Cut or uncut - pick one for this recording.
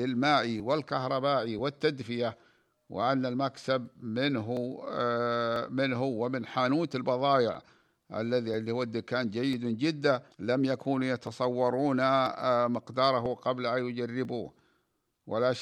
cut